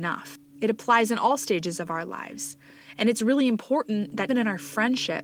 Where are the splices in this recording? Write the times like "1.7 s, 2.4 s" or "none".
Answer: 4.3 s